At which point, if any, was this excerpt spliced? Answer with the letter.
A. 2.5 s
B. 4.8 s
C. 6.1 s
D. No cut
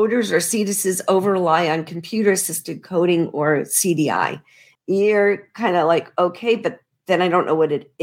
B